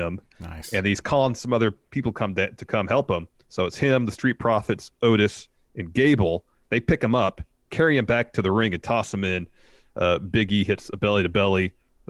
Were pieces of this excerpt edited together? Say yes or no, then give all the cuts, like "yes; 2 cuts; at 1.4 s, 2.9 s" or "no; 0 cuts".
no; 0 cuts